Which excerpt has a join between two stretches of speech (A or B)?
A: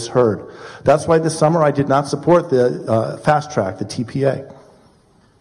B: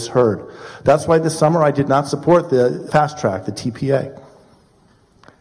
B